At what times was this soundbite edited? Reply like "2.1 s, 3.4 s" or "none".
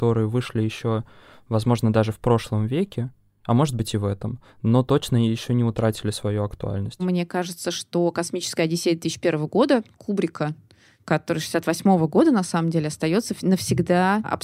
none